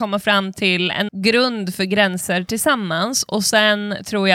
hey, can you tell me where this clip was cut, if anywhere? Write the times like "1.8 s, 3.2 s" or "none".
1.1 s